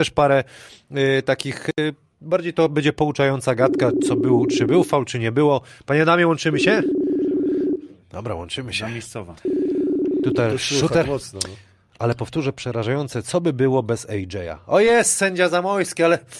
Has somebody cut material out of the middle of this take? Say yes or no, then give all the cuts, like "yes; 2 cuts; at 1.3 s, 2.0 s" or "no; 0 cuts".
no; 0 cuts